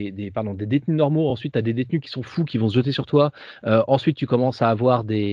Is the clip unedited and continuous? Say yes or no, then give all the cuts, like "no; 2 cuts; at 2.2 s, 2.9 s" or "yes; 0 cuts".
yes; 0 cuts